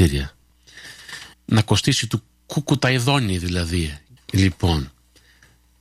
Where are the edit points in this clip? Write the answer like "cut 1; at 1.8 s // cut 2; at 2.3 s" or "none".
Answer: cut 1; at 1.3 s // cut 2; at 4.2 s